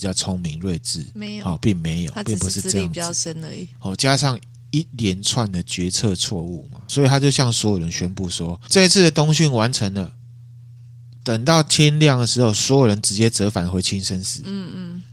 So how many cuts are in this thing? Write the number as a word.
one